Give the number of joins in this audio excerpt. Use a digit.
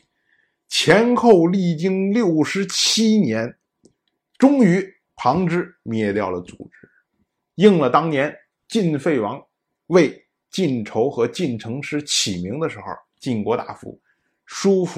0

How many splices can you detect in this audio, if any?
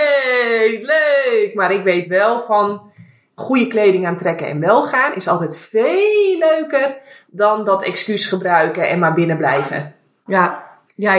0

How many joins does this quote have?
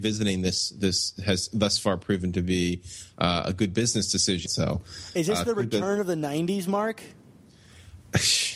1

